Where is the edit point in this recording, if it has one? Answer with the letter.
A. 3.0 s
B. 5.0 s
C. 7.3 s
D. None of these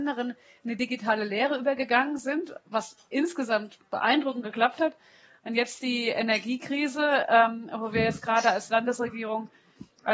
D